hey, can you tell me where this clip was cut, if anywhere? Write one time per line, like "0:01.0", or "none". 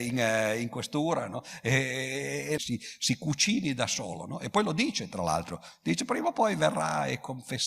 0:02.6